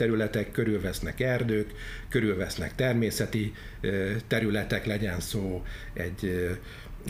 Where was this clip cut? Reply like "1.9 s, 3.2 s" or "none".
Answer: none